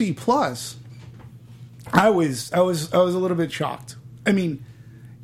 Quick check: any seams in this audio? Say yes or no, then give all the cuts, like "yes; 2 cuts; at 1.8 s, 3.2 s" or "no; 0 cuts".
no; 0 cuts